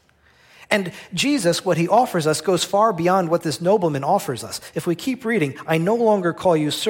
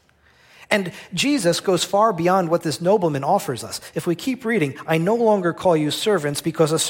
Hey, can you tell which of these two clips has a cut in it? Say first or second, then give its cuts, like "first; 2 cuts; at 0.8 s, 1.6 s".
second; 1 cut; at 1.6 s